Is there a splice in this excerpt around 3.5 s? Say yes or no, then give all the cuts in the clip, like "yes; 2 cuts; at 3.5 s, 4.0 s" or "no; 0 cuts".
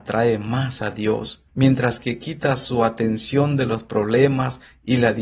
no; 1 cut; at 1.5 s